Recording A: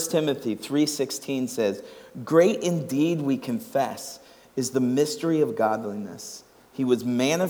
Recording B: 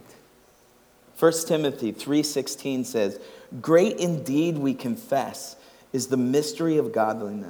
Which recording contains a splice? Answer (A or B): B